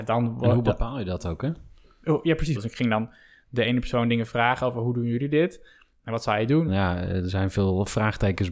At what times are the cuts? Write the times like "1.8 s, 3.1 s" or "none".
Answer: 2.6 s, 6.7 s